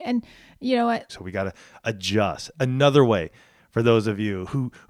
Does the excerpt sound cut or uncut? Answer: cut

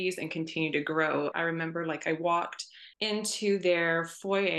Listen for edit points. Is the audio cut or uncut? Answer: cut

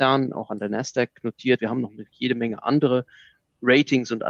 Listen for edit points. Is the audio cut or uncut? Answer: cut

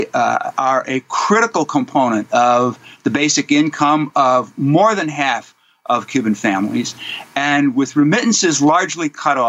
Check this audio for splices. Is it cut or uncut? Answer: uncut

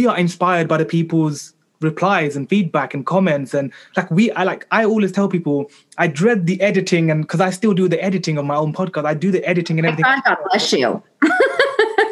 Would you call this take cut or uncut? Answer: uncut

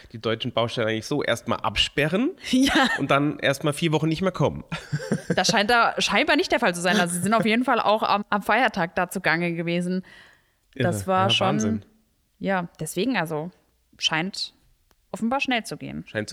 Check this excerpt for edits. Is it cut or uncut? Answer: cut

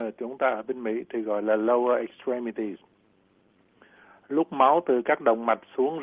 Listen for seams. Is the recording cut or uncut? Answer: uncut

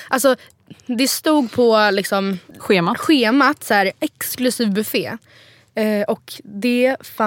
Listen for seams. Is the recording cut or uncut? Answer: cut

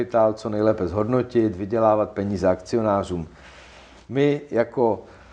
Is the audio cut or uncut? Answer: uncut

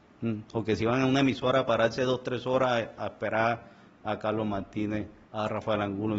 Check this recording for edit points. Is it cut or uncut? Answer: cut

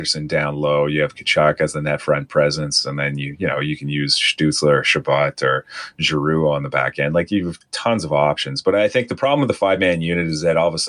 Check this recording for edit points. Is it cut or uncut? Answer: uncut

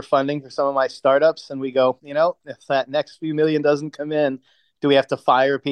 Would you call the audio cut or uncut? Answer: cut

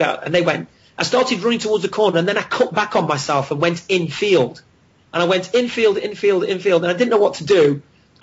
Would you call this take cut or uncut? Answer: cut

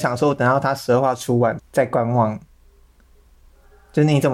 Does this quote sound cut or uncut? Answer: cut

